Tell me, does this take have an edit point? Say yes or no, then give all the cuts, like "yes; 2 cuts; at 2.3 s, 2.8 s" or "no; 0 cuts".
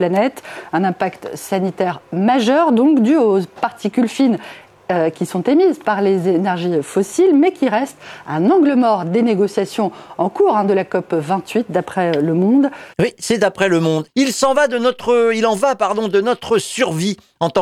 yes; 2 cuts; at 12.9 s, 14.1 s